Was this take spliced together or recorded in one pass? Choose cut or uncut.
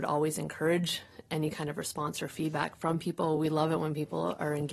uncut